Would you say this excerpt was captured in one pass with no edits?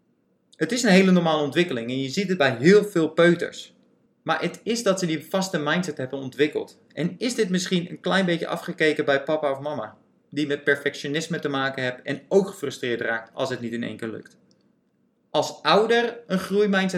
yes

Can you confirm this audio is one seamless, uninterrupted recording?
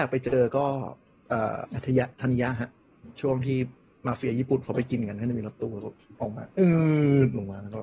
no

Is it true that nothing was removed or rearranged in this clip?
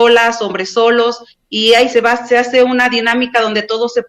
no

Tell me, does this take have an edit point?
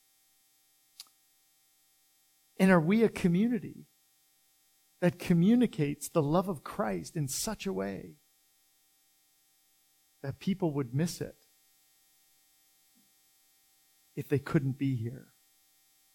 no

